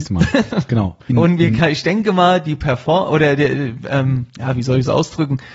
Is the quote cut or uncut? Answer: cut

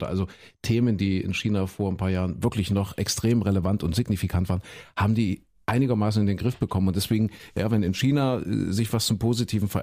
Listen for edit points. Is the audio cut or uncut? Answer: uncut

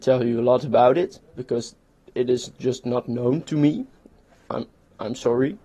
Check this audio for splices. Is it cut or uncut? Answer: uncut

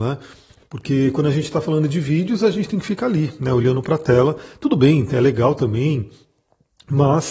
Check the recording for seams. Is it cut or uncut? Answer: uncut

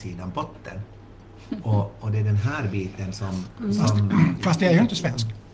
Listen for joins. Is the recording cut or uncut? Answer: uncut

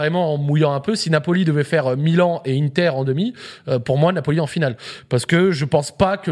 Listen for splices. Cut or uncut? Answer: uncut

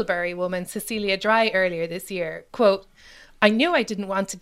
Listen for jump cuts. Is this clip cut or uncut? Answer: uncut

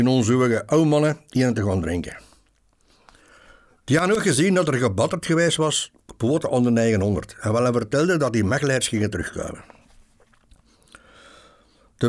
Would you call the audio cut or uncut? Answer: uncut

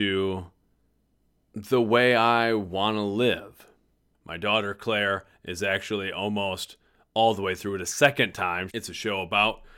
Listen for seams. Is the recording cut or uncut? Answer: cut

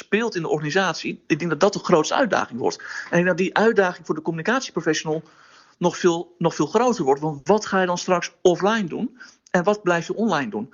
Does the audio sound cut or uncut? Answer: uncut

